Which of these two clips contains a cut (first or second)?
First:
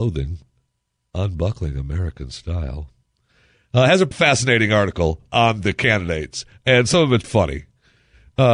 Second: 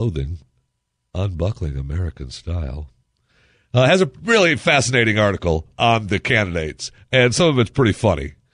first